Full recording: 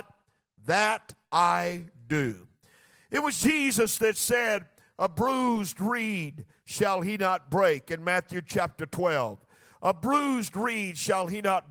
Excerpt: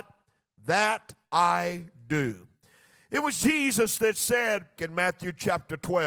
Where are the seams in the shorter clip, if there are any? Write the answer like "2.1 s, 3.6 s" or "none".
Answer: 4.8 s

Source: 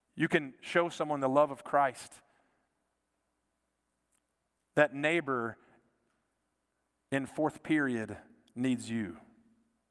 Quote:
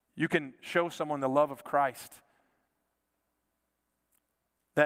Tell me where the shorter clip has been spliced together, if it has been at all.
none

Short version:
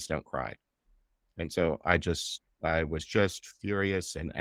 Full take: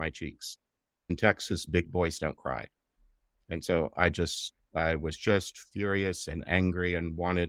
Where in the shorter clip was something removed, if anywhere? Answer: none

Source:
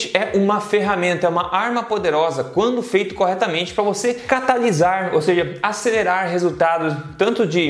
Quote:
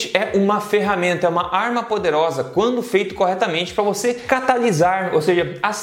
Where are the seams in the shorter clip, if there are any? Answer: none

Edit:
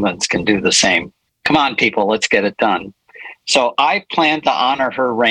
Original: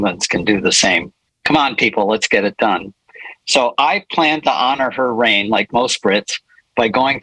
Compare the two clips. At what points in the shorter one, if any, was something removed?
none

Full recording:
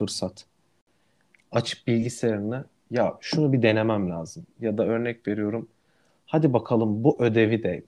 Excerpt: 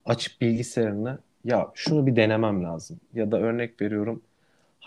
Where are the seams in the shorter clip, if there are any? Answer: none

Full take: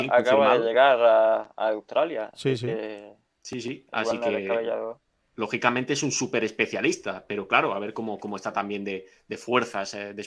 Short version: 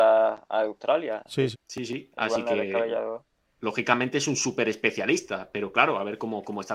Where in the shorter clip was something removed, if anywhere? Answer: 1.5 s

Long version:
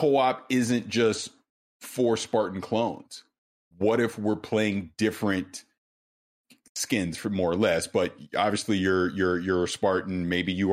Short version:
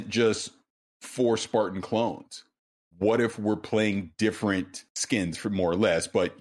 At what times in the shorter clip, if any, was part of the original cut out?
4.9 s

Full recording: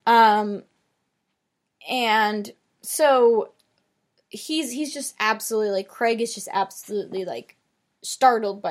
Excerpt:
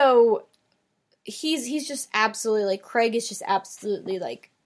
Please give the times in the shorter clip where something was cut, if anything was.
none

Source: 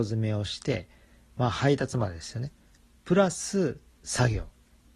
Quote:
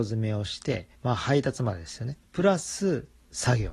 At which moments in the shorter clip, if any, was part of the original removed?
1.0 s, 2.3 s

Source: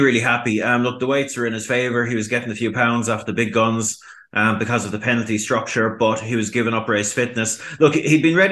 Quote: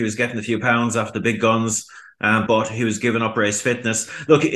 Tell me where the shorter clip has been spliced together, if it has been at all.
2.5 s

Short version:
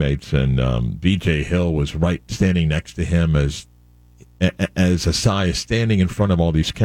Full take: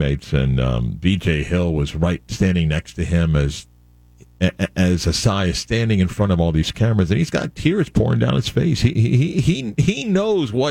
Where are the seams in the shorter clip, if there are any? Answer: none

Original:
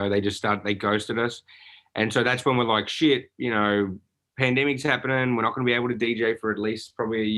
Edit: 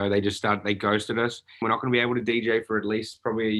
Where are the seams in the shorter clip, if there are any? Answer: 1.6 s

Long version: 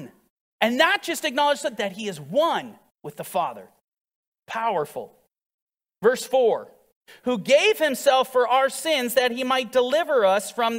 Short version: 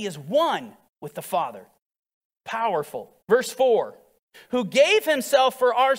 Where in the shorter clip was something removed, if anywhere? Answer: 3.2 s

